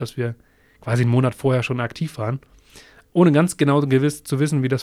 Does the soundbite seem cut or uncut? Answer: uncut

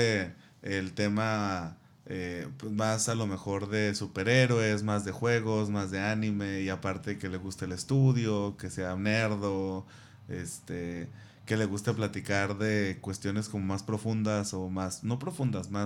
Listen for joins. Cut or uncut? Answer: uncut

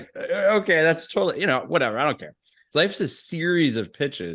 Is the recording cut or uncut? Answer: cut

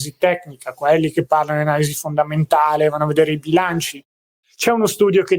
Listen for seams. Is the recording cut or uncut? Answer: cut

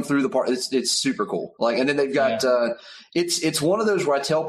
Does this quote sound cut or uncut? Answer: uncut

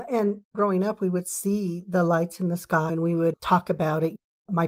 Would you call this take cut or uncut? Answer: cut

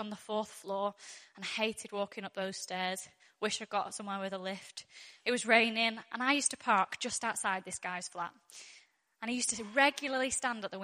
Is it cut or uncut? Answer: uncut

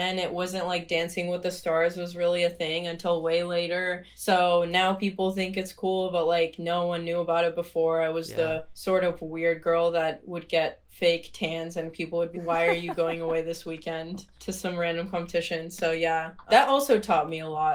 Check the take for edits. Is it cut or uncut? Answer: cut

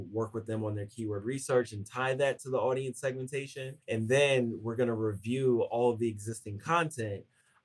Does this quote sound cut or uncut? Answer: cut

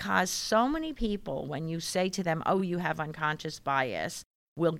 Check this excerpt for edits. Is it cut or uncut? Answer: uncut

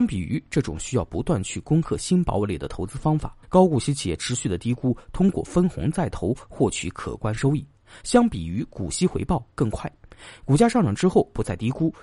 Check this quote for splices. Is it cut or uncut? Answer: cut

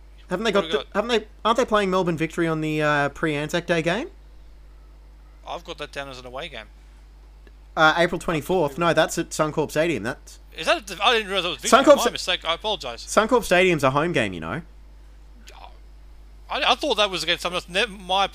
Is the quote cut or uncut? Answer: uncut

